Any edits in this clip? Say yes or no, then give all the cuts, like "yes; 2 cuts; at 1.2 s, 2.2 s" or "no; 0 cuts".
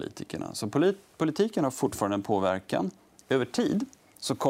no; 0 cuts